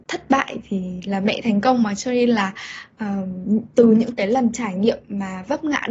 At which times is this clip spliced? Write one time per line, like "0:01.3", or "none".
none